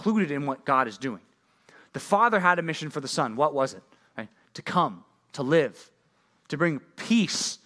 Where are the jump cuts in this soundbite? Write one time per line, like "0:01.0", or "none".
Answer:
none